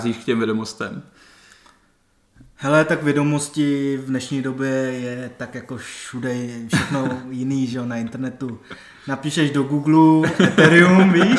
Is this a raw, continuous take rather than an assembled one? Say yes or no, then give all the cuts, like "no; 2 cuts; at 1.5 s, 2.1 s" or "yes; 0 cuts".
yes; 0 cuts